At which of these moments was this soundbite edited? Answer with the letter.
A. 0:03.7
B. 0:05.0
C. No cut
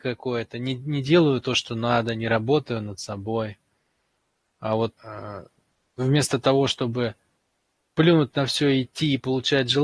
B